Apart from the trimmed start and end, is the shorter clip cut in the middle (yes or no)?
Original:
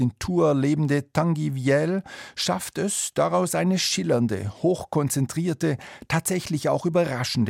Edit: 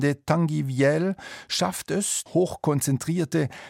yes